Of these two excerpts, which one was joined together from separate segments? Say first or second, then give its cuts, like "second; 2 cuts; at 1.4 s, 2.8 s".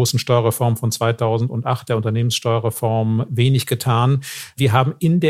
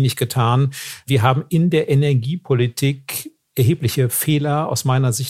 second; 1 cut; at 3.4 s